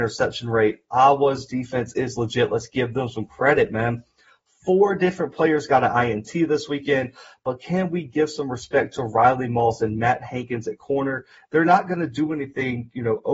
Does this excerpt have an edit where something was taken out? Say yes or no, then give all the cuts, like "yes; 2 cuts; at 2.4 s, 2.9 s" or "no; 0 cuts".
yes; 1 cut; at 11.4 s